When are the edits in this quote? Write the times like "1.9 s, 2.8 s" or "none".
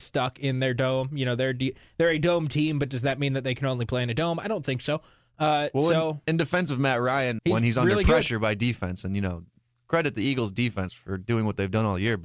7.4 s